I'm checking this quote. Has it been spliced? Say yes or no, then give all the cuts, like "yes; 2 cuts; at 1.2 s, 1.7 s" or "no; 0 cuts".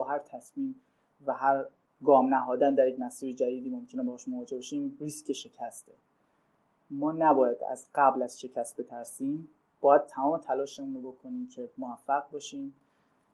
no; 0 cuts